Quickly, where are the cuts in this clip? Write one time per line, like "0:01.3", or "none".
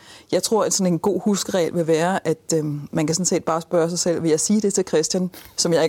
none